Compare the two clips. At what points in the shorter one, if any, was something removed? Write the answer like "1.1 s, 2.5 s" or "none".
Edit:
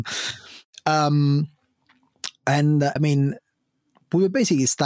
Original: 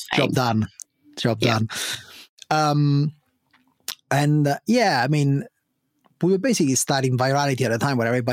3.0 s

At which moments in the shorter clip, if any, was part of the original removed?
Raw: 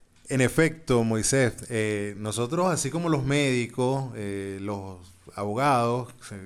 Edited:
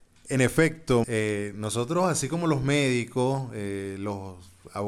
1.0 s

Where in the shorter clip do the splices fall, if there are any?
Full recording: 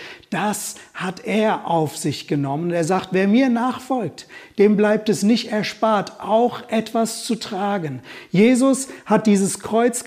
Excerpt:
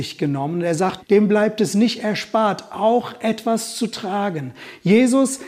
1.0 s

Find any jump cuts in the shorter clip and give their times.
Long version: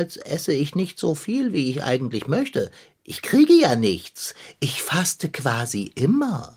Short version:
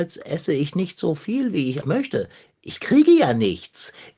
1.8 s

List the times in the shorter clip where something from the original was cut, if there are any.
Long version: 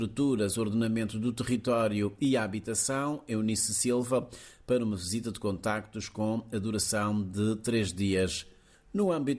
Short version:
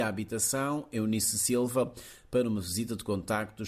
none

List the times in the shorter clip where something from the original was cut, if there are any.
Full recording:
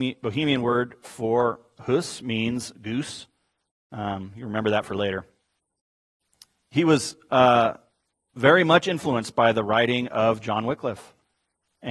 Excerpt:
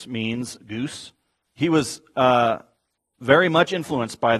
1.5 s

